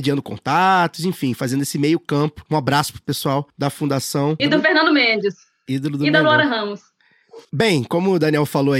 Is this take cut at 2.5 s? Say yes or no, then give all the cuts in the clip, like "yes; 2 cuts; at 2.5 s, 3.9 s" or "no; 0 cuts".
no; 2 cuts; at 4.4 s, 7.4 s